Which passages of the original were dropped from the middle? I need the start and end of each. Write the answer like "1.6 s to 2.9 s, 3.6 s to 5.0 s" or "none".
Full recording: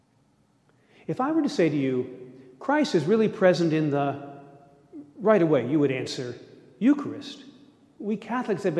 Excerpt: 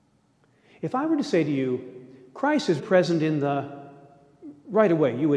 3.0 s to 3.3 s